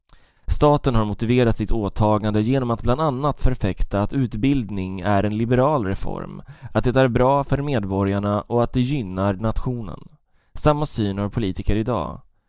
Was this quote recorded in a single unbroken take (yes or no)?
yes